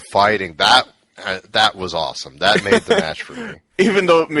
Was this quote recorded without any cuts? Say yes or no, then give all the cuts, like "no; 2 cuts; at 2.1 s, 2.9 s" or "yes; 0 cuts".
yes; 0 cuts